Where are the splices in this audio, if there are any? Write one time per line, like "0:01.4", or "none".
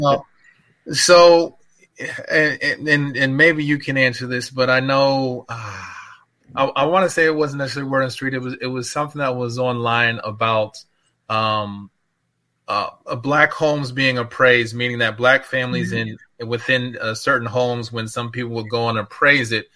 none